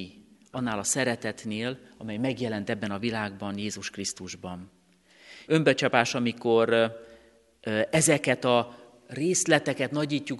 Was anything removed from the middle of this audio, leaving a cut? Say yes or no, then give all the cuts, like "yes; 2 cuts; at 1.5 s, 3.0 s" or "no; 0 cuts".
yes; 1 cut; at 5.5 s